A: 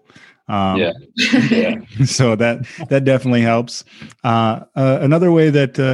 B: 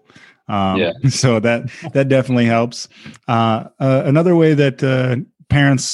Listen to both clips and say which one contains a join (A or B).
B